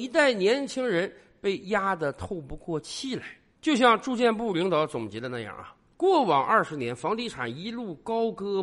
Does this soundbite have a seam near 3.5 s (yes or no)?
no